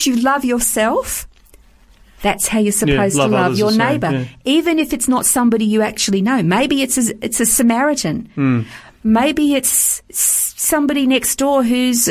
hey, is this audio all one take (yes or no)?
yes